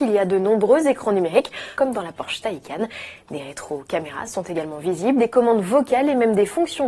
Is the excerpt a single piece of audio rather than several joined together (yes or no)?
no